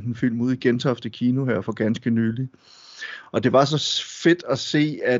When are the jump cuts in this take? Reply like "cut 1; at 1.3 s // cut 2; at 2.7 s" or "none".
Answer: none

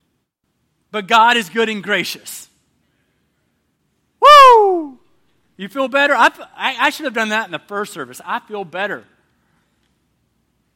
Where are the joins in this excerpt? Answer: none

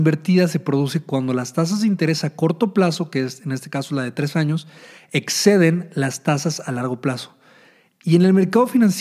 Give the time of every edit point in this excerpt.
none

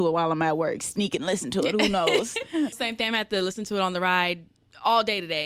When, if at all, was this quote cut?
cut 1; at 2.7 s

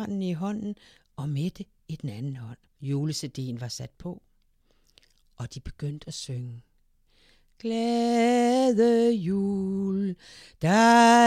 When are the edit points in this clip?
cut 1; at 2.8 s

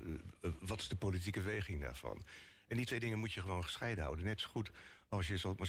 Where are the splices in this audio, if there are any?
none

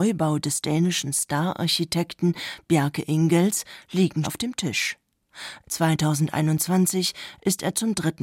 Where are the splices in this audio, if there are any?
cut 1; at 4.2 s // cut 2; at 5.6 s

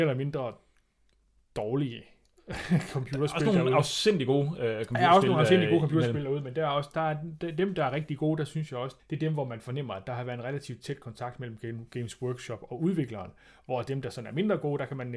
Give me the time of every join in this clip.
cut 1; at 9.0 s

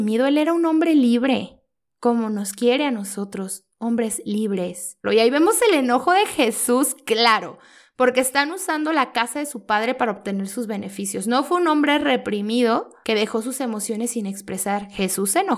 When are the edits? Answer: cut 1; at 5.0 s

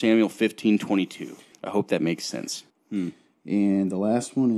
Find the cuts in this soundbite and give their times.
cut 1; at 1.5 s // cut 2; at 2.7 s

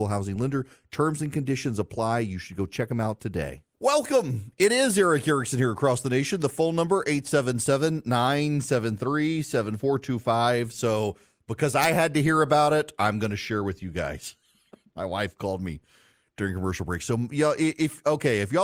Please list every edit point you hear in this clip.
none

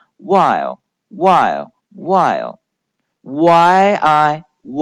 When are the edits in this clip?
cut 1; at 1.8 s

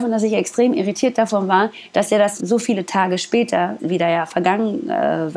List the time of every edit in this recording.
none

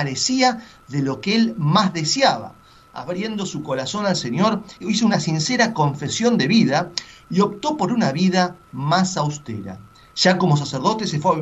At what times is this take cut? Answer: cut 1; at 4.8 s // cut 2; at 10.1 s

